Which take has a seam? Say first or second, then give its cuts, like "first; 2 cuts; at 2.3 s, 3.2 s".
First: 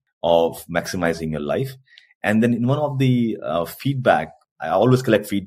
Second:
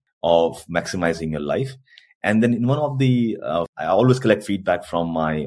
second; 1 cut; at 3.7 s